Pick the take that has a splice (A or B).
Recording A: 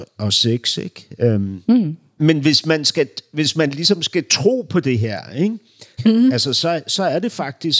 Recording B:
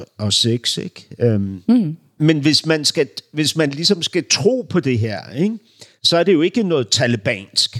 A